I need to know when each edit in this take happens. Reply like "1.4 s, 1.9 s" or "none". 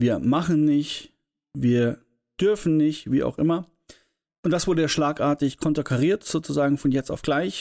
none